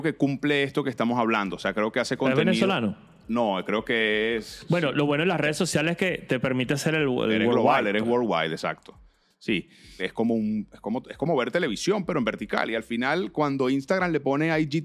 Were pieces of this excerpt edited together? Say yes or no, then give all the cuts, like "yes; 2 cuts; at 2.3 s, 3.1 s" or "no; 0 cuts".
yes; 1 cut; at 10.0 s